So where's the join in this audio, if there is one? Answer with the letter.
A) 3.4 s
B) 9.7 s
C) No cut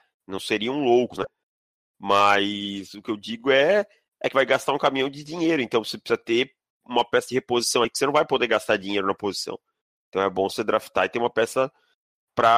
C